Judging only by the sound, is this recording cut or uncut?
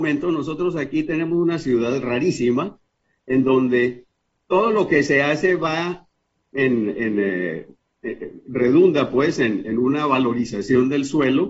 uncut